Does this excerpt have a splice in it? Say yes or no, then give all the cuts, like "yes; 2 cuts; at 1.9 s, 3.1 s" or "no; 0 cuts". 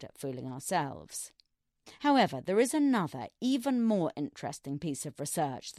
no; 0 cuts